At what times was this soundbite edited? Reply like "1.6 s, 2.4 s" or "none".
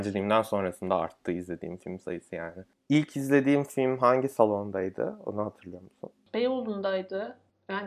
none